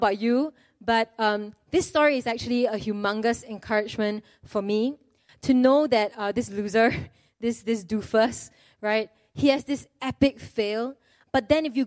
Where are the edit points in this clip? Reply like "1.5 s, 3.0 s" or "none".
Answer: none